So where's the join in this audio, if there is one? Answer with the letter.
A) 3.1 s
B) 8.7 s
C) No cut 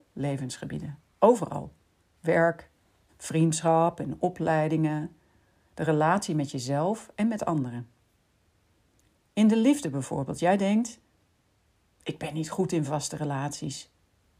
A